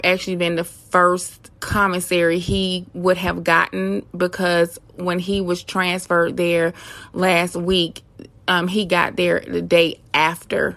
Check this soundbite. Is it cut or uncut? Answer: cut